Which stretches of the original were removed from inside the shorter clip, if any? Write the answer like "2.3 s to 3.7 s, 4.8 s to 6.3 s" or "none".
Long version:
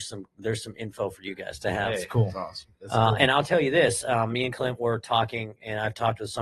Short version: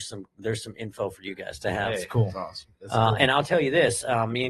none